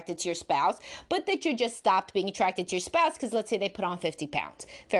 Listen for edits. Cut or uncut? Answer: uncut